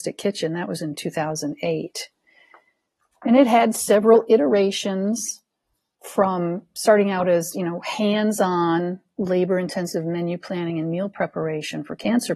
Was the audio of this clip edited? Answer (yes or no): no